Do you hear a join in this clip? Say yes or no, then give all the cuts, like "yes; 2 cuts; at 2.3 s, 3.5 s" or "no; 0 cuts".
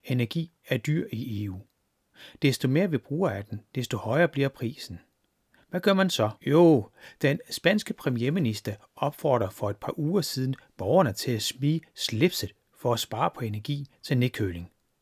yes; 1 cut; at 6.4 s